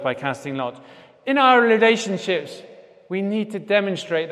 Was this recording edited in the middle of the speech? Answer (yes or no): no